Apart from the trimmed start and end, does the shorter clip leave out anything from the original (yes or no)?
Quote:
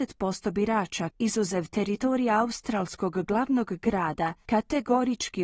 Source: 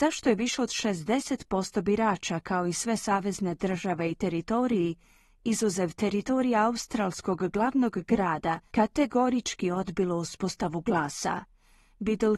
yes